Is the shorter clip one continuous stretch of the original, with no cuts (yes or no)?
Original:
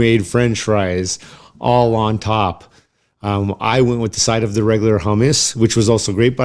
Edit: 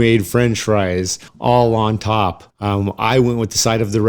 no